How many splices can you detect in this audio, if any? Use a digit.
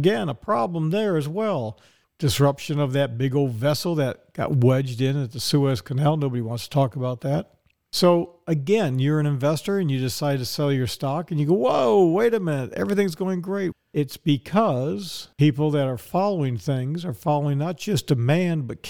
2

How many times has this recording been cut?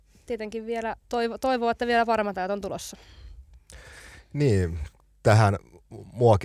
1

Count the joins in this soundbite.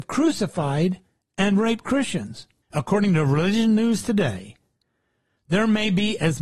1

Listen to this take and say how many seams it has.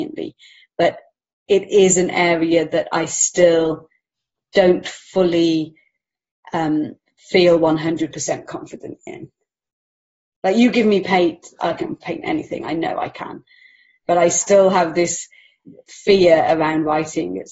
1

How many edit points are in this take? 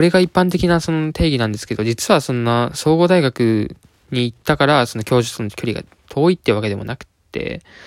0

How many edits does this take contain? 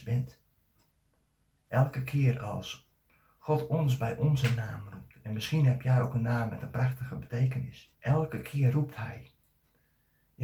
2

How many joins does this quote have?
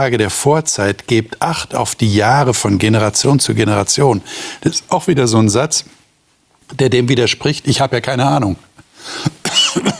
2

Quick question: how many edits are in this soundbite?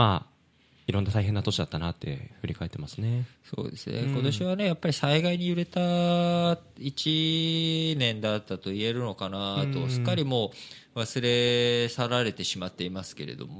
0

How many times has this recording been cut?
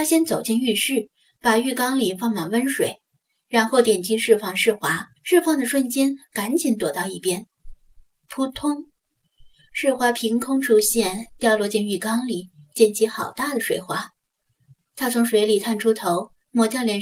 1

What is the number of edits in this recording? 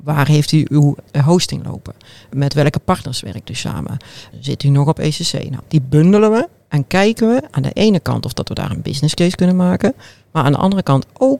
2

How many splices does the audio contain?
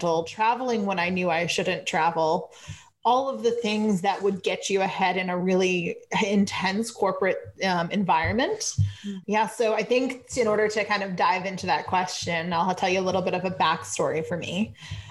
1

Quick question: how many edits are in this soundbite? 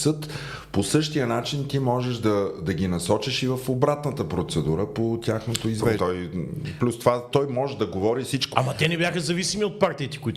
3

